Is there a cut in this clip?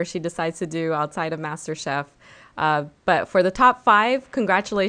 no; 0 cuts

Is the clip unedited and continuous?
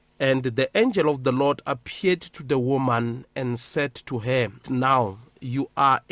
no; 1 cut; at 4.6 s

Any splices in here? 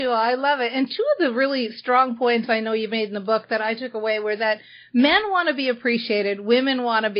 no; 0 cuts

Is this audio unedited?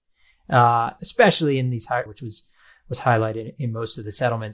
no; 2 cuts; at 1.0 s, 2.1 s

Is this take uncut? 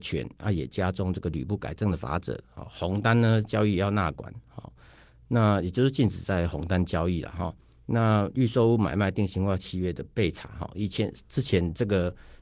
yes; 0 cuts

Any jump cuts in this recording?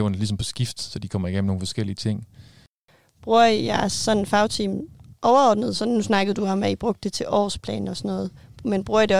no; 0 cuts

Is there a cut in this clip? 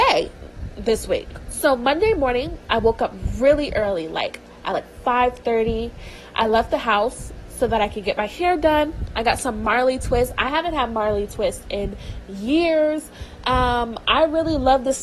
no; 0 cuts

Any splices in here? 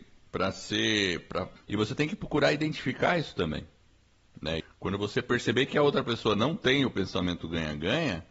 yes; 2 cuts; at 1.6 s, 4.6 s

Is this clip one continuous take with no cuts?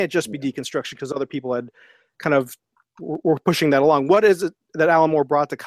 yes; 0 cuts

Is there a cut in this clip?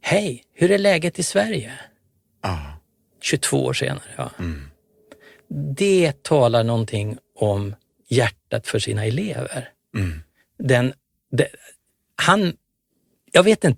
no; 0 cuts

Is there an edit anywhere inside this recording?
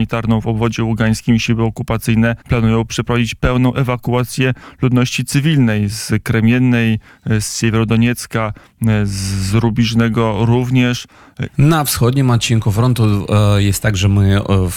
yes; 2 cuts; at 2.4 s, 11.5 s

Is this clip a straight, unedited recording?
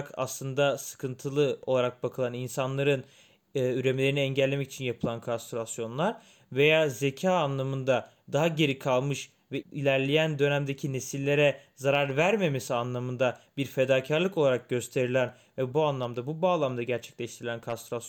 no; 2 cuts; at 9.6 s, 15.7 s

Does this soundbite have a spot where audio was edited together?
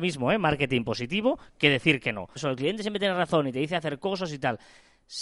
yes; 1 cut; at 2.4 s

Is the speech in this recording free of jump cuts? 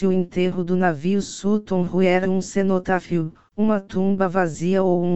no; 1 cut; at 2.2 s

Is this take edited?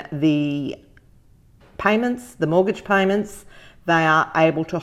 no; 0 cuts

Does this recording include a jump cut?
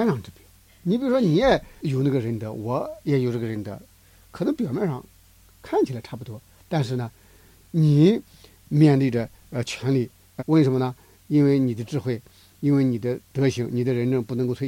yes; 1 cut; at 10.4 s

